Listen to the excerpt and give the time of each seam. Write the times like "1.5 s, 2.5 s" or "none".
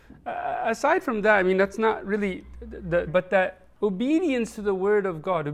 3.1 s

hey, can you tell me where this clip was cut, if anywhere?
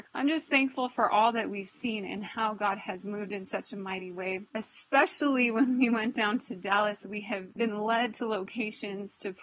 7.0 s

